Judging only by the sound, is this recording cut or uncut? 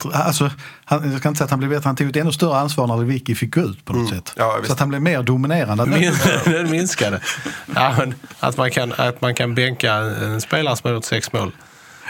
cut